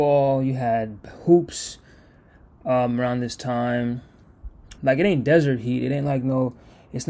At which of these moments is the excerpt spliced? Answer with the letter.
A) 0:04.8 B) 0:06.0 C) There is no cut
A